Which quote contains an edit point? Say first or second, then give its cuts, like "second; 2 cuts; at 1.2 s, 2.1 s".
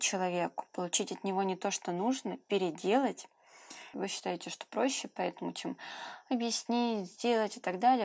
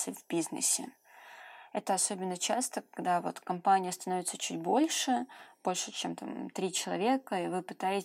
first; 1 cut; at 3.9 s